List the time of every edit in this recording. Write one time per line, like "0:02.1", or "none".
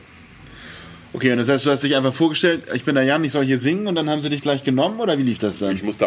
none